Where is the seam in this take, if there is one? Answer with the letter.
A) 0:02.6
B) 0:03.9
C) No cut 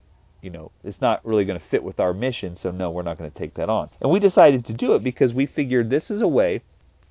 B